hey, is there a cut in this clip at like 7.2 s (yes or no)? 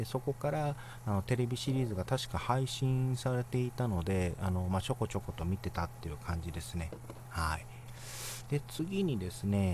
yes